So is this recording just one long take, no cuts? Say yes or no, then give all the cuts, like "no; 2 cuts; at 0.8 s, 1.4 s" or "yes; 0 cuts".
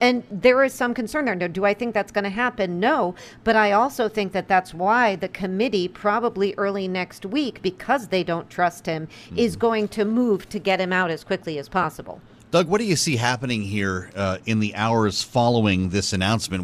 yes; 0 cuts